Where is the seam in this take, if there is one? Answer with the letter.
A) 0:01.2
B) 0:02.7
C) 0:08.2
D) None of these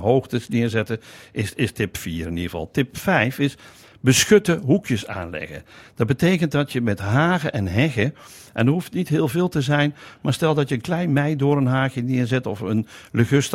D